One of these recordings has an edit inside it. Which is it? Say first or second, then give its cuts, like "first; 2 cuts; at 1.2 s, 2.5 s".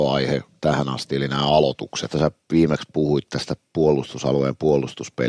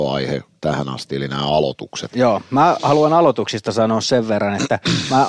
first; 1 cut; at 2.1 s